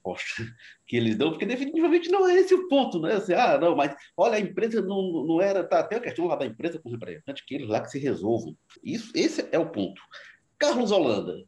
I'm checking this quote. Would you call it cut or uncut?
cut